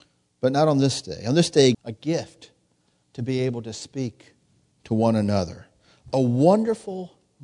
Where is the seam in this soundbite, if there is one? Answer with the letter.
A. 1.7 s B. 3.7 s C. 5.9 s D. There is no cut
A